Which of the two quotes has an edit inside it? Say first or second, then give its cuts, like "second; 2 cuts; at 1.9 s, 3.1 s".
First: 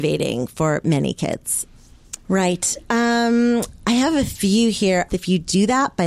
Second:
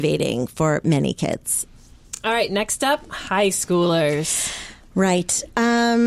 first; 2 cuts; at 2.2 s, 5.1 s